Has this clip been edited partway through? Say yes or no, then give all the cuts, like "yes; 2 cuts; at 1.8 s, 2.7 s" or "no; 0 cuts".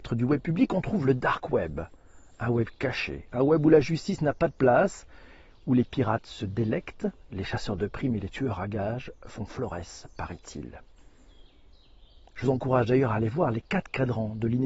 no; 0 cuts